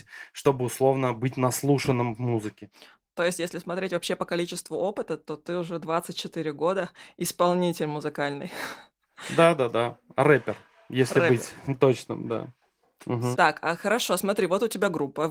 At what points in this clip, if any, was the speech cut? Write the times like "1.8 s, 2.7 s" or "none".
13.3 s

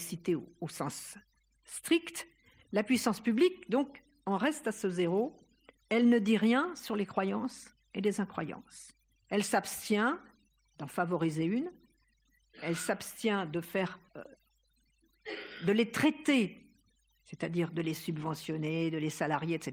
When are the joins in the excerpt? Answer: 14.1 s

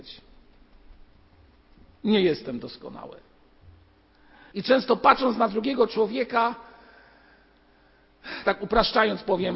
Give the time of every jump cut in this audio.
4.5 s

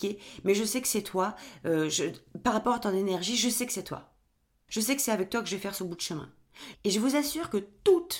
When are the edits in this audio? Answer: 4.7 s, 6.7 s

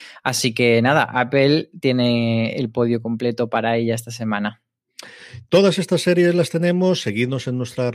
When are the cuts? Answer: none

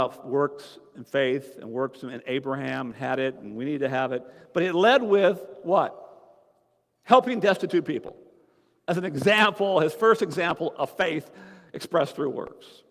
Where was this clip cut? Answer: none

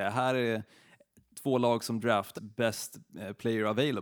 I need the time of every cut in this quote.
2.3 s

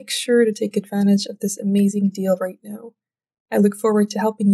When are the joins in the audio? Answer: 3.4 s

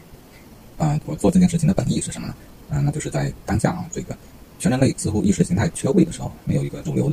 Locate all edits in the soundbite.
1.0 s

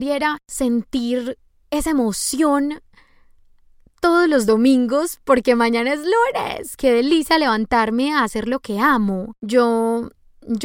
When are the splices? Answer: 6.8 s, 9.4 s

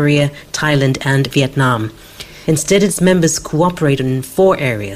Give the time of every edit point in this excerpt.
2.4 s

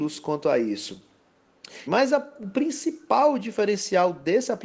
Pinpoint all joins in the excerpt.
1.9 s

